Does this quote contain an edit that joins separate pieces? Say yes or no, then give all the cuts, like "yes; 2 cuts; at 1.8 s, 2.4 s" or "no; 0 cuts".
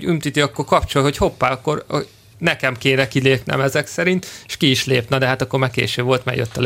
no; 0 cuts